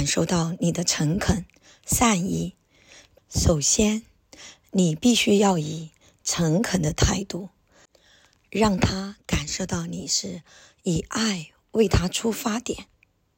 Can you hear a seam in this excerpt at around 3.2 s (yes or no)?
yes